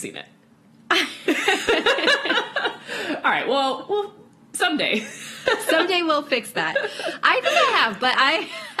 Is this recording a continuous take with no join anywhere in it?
yes; 0 cuts

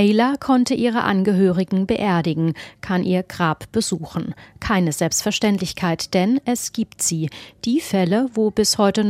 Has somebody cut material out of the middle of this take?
no; 0 cuts

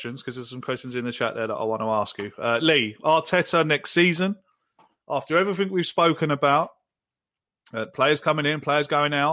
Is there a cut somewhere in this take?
no; 0 cuts

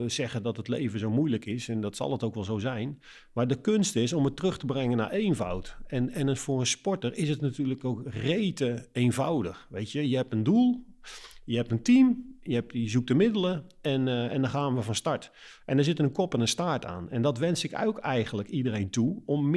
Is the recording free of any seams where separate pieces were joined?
yes; 0 cuts

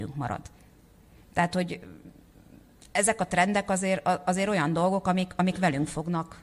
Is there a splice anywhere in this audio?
no; 0 cuts

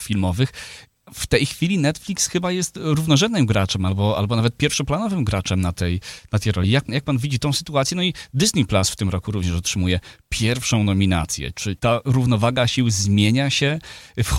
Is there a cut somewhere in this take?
no; 0 cuts

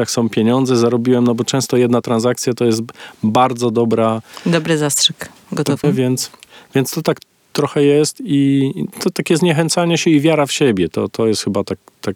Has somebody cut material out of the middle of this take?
yes; 1 cut; at 5.8 s

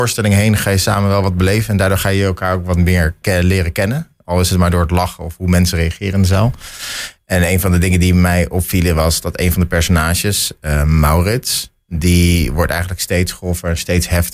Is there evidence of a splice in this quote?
no; 0 cuts

